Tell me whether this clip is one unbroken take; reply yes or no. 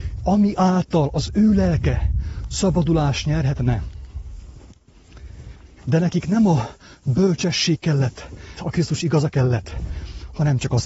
no